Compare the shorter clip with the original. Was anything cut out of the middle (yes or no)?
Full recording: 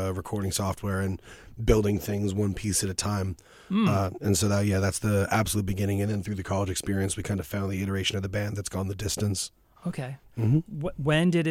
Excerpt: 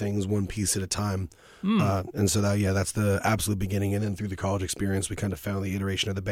no